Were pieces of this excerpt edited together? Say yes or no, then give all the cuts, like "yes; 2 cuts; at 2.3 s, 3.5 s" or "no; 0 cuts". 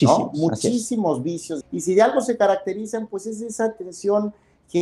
yes; 1 cut; at 1.6 s